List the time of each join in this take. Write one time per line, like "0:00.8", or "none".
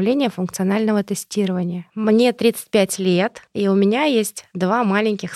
0:03.5

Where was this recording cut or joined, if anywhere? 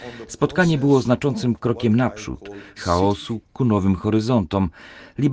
0:02.8

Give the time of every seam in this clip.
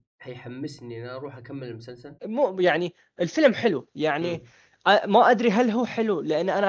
0:02.2

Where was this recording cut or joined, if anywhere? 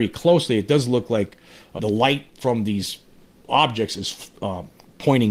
0:01.8

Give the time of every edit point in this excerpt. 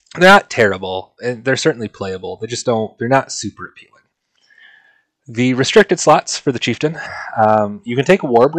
none

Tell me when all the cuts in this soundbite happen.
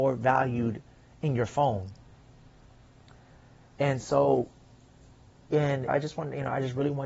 0:05.9

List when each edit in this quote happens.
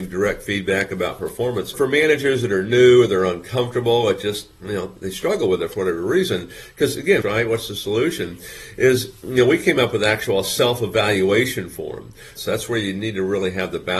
0:01.7
0:07.2
0:12.4

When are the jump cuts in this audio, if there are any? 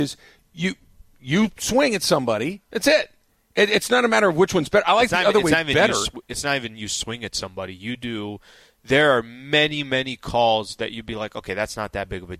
none

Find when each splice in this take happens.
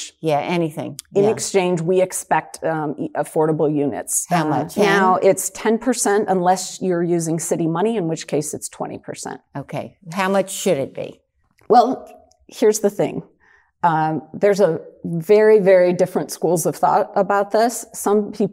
0:04.8

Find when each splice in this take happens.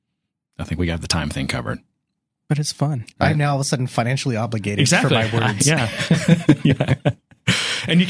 0:03.2

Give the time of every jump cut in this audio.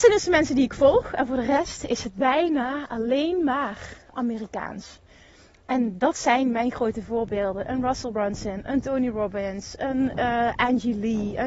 none

